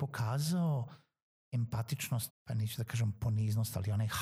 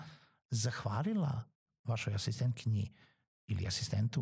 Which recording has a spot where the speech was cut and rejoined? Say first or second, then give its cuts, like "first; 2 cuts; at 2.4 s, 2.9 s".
first; 1 cut; at 2.3 s